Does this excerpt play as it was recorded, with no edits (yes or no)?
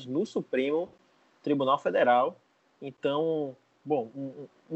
yes